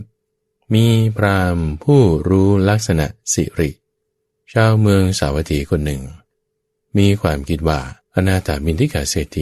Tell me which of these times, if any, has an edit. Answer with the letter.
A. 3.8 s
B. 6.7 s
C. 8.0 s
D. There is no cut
C